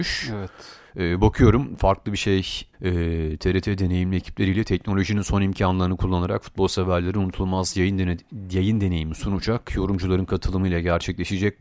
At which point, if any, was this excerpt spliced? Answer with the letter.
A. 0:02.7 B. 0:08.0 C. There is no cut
A